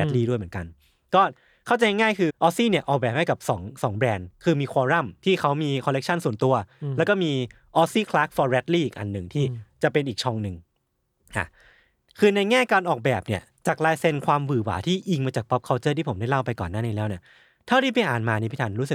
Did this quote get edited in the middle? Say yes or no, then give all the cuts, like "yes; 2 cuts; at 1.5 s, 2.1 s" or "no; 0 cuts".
yes; 1 cut; at 2.3 s